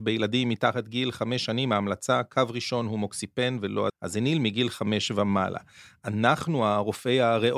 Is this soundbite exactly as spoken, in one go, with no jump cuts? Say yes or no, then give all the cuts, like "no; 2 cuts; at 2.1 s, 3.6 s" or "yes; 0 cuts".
no; 1 cut; at 3.9 s